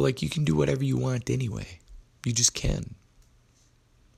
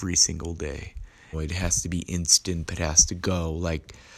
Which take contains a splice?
second; 2 cuts; at 1.3 s, 2.7 s

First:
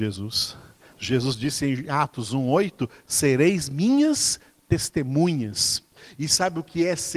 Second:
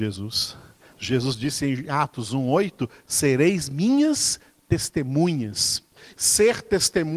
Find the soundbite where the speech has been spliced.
second; 1 cut; at 6.1 s

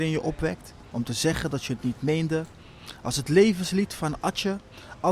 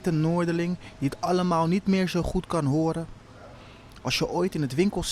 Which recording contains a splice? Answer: first; 1 cut; at 0.9 s

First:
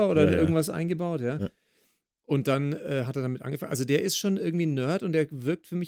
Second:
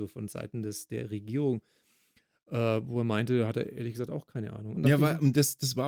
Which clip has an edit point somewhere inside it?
second; 1 cut; at 4.8 s

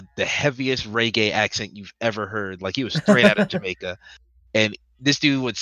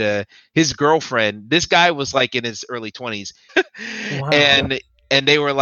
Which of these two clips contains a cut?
second; 1 cut; at 3.5 s

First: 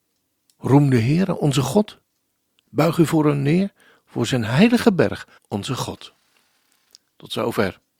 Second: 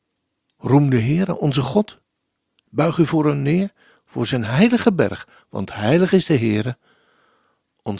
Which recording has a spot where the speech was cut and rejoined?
first; 1 cut; at 5.4 s

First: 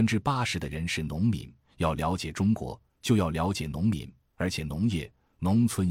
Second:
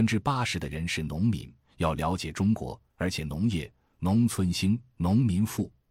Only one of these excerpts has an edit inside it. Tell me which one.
second; 1 cut; at 2.9 s

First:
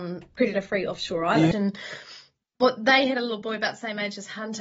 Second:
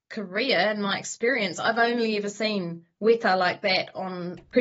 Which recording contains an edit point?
first; 1 cut; at 1.5 s

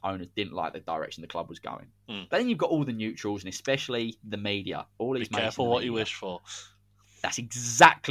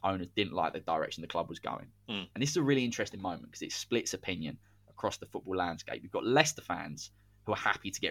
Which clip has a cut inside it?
first; 1 cut; at 2.3 s

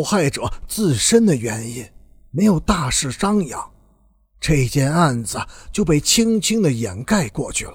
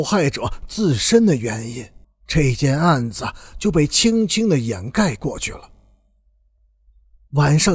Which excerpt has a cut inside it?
second; 1 cut; at 2.0 s

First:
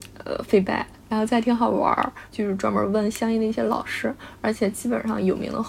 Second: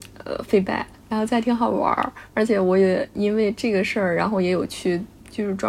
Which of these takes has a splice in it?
first; 1 cut; at 2.3 s

